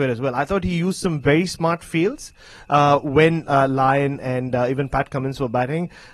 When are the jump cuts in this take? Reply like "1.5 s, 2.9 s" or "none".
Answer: none